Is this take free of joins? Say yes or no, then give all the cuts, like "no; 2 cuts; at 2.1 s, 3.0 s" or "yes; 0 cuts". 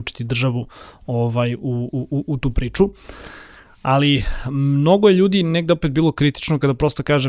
yes; 0 cuts